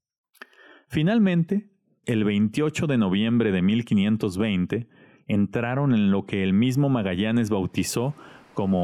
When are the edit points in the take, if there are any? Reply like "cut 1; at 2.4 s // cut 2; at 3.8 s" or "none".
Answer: cut 1; at 2.0 s